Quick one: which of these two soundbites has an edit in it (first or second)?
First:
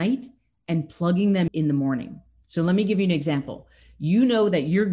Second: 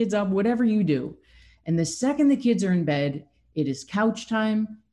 first